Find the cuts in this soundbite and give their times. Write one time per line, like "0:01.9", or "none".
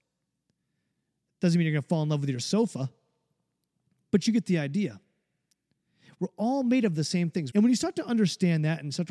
0:07.5